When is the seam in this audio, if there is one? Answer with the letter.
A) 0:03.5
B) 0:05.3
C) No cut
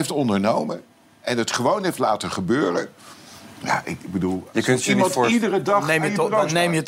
C